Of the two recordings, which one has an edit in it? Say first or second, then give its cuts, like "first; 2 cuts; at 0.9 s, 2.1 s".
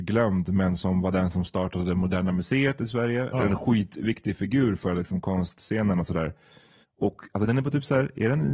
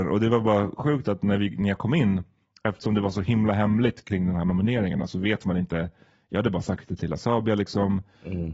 first; 2 cuts; at 3.3 s, 6.8 s